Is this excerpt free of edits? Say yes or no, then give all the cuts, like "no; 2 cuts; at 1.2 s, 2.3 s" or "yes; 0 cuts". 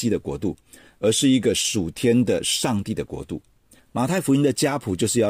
no; 1 cut; at 3.8 s